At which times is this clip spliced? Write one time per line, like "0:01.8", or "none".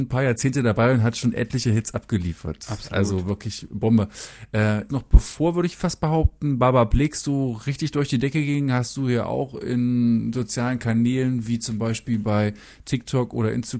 0:04.9